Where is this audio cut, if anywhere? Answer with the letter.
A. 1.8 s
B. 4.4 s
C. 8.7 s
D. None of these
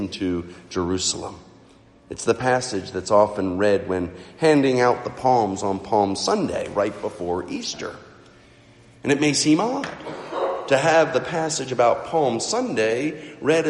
D